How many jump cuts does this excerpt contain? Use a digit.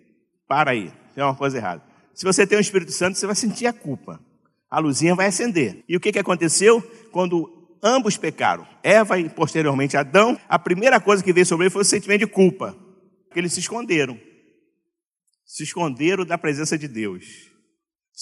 3